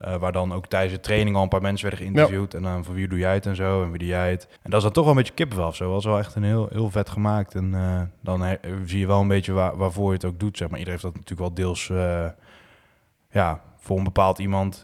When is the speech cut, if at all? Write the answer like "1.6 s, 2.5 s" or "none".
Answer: 4.6 s